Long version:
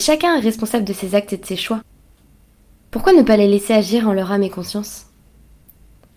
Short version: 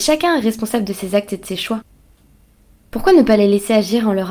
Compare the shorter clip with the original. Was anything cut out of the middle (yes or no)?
no